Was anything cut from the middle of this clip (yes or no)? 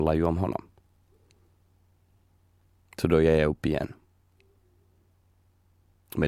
no